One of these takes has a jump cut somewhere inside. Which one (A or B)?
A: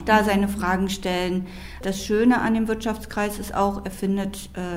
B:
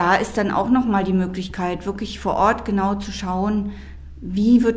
A